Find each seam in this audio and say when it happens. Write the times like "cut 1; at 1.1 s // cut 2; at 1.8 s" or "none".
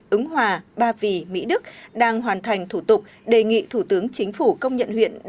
none